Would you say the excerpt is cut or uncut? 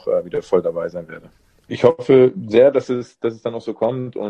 cut